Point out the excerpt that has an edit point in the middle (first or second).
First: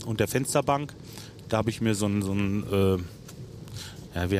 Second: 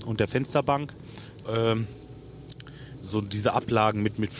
second